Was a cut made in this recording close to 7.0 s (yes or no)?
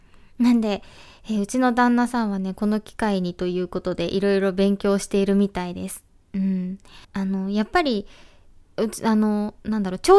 yes